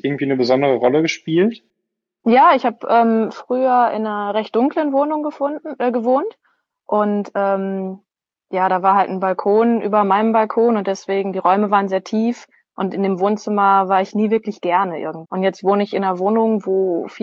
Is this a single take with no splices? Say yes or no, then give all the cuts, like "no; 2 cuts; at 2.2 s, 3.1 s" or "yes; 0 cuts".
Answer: no; 1 cut; at 15.2 s